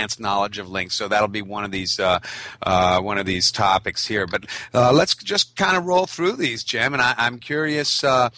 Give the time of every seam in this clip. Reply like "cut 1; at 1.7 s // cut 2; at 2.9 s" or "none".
none